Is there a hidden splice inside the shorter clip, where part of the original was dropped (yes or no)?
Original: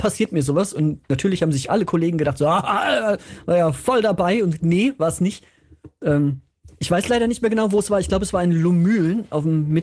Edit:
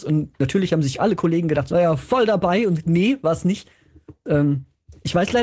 yes